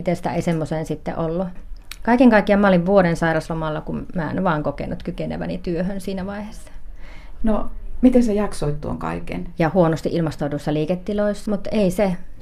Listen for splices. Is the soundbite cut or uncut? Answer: cut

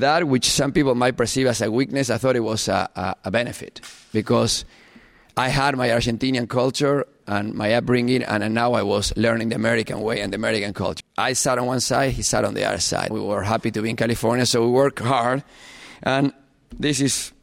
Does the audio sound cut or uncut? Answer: cut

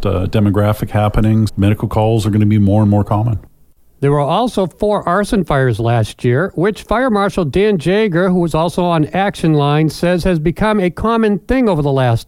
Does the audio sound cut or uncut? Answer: cut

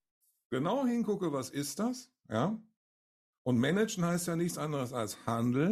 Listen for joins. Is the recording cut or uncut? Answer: uncut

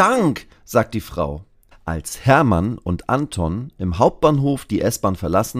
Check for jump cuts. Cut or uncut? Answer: cut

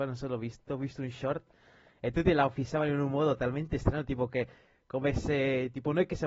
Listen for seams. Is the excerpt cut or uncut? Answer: uncut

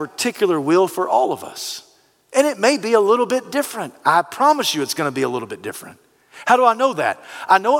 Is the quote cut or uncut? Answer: uncut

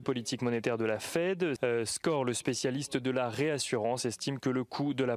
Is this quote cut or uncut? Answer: cut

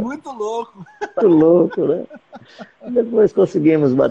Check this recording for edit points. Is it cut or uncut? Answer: cut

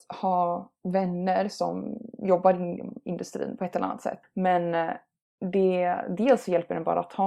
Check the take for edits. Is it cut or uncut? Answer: cut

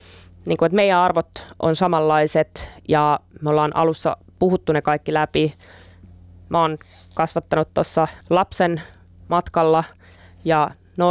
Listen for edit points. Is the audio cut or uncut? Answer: cut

